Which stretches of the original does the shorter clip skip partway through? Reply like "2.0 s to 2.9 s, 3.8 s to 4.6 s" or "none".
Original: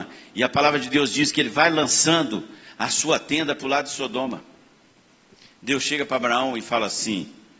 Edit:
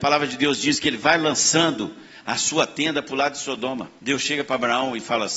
4.5 s to 5.6 s